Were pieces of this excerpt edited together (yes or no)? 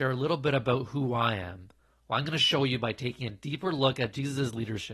yes